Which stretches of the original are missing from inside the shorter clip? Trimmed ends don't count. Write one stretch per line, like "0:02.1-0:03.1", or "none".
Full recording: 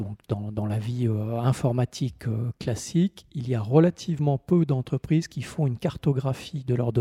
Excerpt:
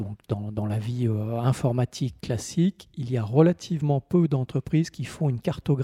0:02.2-0:02.6